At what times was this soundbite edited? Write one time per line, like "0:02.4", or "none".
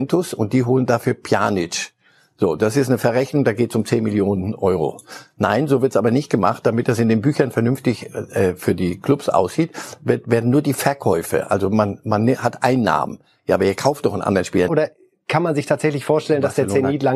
0:14.7